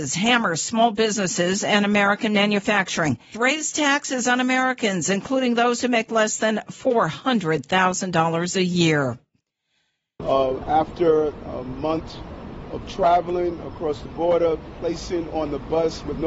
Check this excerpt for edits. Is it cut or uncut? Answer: cut